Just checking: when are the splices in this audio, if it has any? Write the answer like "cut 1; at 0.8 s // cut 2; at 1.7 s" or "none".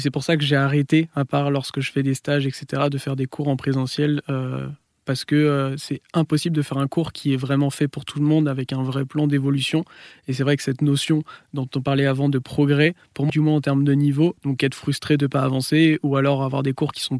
cut 1; at 13.3 s // cut 2; at 14.4 s